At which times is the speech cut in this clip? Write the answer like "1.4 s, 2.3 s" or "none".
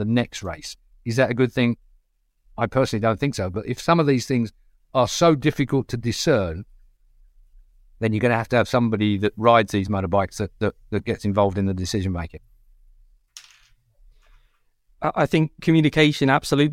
none